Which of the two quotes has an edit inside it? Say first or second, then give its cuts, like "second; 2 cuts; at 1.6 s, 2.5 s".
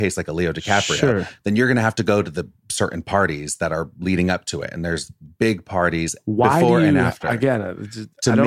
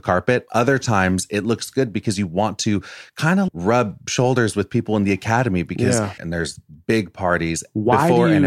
second; 2 cuts; at 3.5 s, 6.2 s